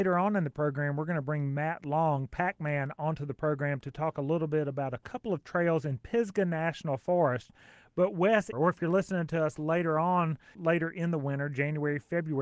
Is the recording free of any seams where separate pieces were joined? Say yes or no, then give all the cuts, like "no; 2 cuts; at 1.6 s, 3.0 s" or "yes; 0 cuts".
no; 2 cuts; at 8.5 s, 10.5 s